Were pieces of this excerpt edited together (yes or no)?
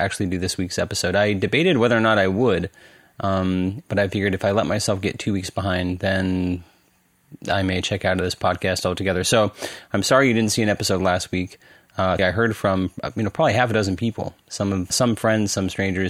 yes